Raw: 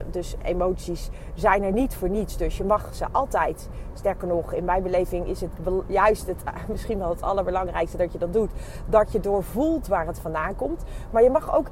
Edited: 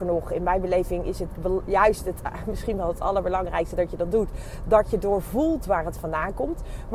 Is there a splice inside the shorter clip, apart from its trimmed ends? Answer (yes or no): no